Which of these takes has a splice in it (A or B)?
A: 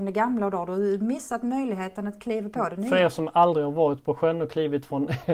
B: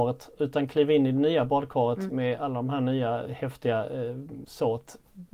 B